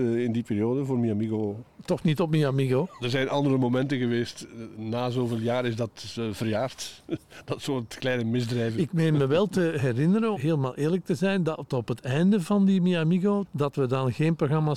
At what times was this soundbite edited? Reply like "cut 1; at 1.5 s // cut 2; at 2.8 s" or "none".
cut 1; at 3.0 s // cut 2; at 10.3 s // cut 3; at 13.4 s